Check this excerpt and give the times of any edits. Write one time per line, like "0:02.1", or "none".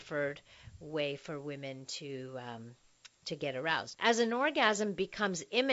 0:03.9

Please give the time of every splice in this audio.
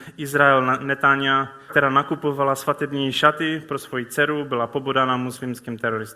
0:01.7

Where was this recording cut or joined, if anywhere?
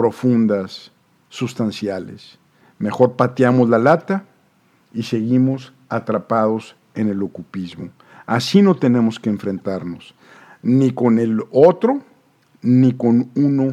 0:02.6

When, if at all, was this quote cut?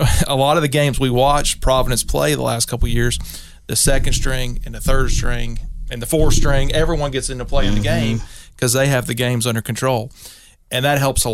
none

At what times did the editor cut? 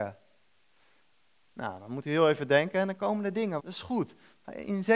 0:03.6

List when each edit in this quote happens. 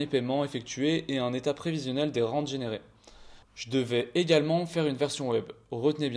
0:03.4

